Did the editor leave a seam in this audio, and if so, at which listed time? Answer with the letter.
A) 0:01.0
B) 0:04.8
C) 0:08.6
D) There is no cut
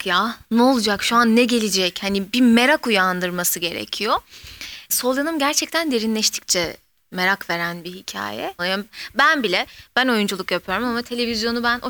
C